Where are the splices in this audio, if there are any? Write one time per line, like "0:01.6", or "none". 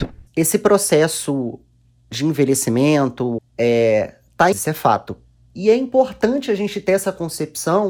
0:03.4
0:04.5